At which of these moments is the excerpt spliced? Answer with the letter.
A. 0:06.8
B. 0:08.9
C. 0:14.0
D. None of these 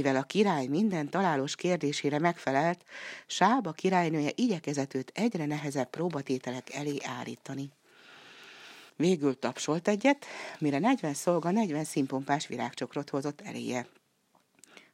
B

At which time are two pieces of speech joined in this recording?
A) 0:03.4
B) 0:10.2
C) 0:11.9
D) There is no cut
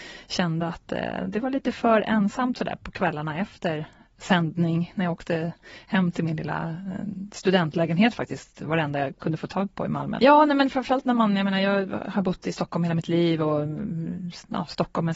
B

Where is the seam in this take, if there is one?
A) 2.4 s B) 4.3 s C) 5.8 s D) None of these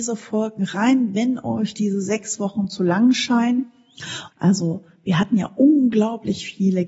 B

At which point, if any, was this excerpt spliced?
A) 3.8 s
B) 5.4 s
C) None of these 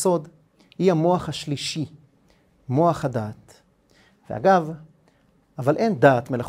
B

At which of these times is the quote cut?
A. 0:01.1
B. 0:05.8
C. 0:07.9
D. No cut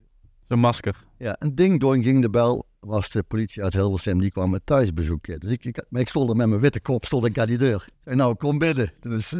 C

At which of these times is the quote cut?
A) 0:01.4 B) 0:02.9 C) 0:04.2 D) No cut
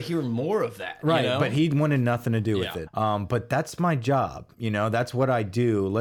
B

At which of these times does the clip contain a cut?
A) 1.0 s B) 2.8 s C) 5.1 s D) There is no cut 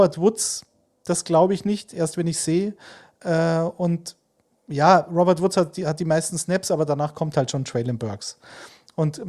D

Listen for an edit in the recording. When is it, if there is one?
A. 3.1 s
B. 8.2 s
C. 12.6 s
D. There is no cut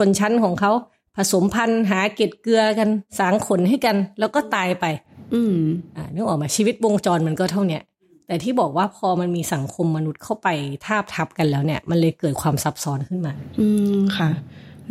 A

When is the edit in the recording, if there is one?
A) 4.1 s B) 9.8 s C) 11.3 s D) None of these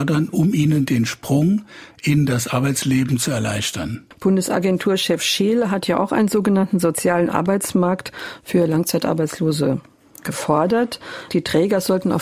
C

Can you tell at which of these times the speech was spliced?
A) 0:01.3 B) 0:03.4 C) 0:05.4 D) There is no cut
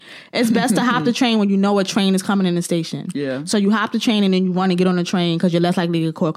D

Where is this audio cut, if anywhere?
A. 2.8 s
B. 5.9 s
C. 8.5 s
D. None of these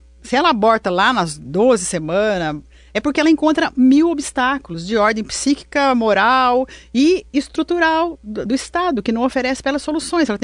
C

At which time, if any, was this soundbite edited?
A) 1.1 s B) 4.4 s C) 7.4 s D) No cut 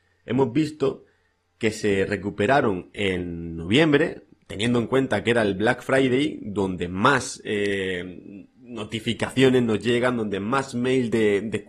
D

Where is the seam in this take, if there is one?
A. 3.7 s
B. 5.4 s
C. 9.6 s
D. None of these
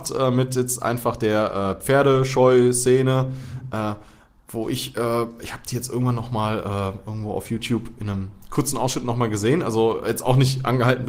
D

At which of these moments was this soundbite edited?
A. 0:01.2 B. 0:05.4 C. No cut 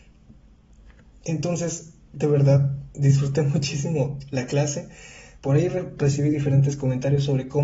B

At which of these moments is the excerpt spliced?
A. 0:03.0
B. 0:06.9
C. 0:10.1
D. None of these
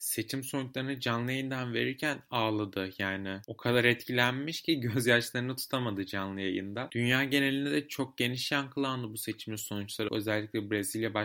C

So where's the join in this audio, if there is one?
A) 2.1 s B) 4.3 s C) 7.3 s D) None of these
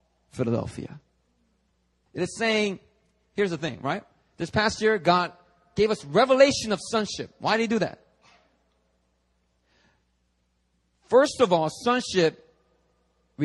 A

